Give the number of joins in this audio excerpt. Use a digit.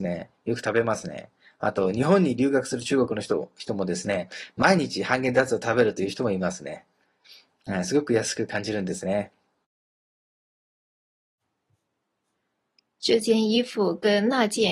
0